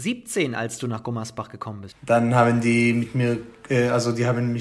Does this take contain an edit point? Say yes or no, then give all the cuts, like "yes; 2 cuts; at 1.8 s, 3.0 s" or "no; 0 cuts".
yes; 1 cut; at 1.9 s